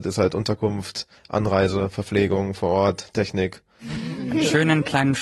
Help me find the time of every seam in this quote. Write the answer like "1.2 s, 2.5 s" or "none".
3.8 s